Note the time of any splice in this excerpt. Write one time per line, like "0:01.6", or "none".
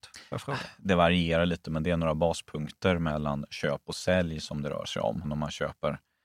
0:05.2